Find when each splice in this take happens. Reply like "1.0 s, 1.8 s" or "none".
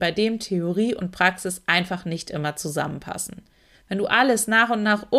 3.7 s